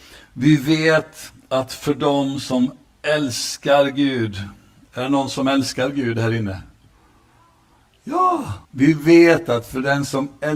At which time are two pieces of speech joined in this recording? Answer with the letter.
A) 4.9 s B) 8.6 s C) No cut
B